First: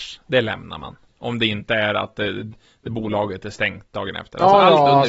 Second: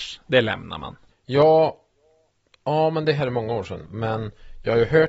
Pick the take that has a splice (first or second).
second